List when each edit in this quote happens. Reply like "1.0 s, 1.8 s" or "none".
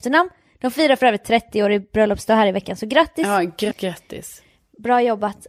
3.7 s